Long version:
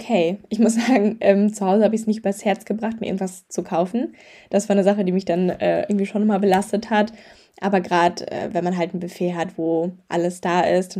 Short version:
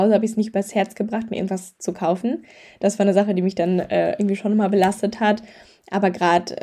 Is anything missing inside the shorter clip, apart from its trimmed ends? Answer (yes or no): no